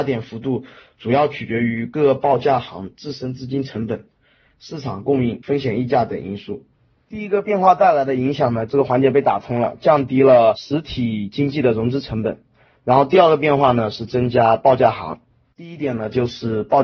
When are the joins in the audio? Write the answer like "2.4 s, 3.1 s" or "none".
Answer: 8.7 s, 15.4 s